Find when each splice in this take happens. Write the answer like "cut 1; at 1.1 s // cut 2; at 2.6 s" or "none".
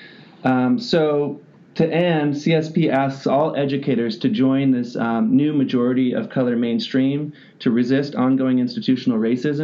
none